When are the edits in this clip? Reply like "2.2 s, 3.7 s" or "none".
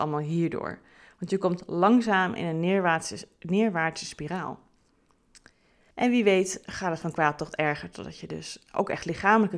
5.9 s